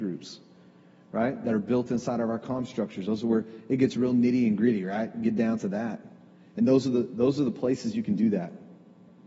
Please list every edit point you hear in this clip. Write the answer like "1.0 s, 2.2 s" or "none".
none